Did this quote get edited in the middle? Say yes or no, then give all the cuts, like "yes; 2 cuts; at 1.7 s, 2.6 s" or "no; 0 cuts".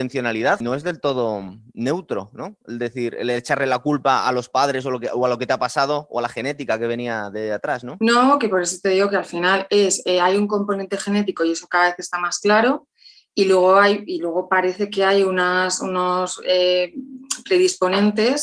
no; 0 cuts